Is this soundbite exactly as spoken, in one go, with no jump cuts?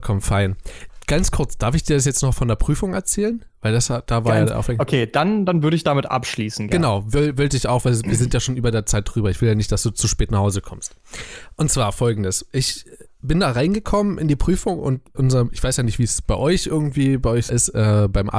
no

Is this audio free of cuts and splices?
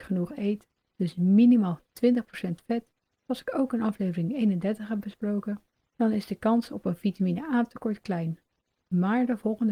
yes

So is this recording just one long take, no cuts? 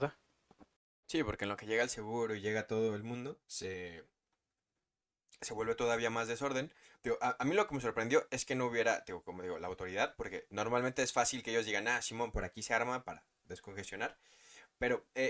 no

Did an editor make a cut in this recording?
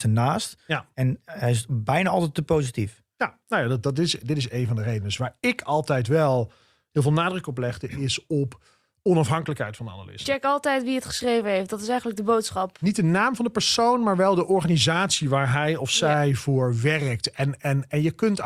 yes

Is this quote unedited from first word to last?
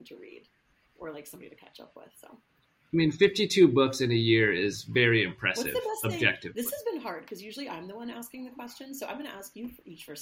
yes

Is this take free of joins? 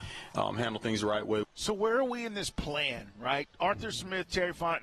no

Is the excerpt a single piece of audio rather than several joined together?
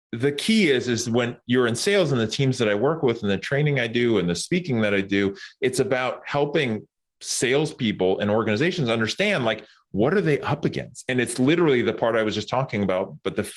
yes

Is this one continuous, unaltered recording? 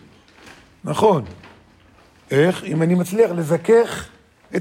yes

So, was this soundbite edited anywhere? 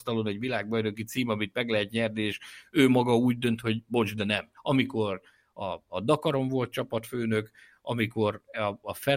yes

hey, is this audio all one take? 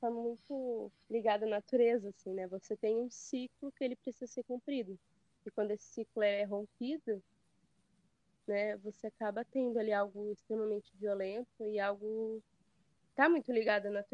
yes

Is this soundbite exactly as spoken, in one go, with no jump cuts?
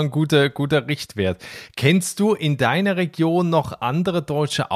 yes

